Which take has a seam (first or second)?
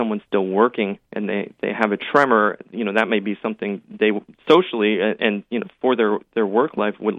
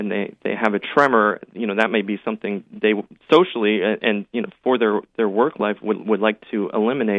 first